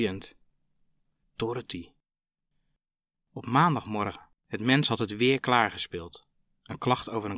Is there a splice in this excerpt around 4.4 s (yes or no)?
yes